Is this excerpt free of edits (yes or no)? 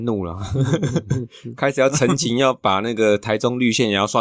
yes